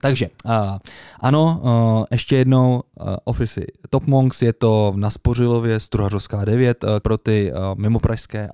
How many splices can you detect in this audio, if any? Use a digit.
1